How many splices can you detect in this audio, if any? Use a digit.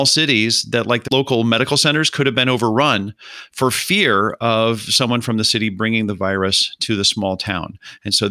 1